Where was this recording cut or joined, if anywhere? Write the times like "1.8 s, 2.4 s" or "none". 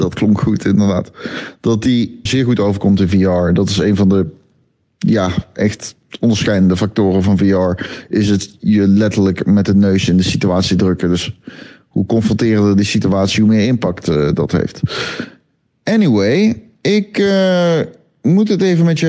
2.3 s